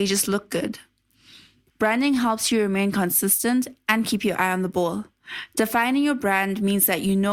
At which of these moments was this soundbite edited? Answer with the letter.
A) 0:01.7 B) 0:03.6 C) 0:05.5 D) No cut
A